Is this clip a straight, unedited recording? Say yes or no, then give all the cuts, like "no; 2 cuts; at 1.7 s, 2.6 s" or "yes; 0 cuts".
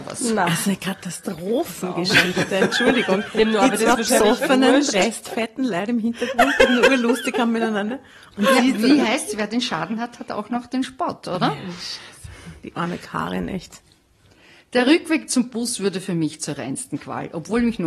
yes; 0 cuts